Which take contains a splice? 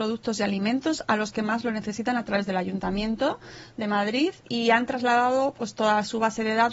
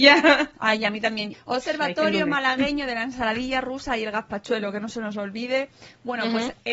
second; 1 cut; at 1.3 s

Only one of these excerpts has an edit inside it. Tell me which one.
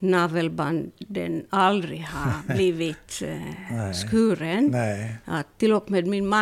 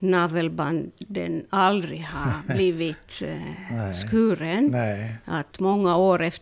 second; 1 cut; at 5.5 s

